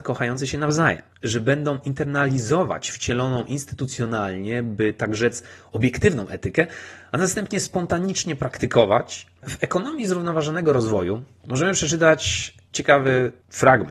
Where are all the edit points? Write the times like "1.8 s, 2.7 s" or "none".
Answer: 9.4 s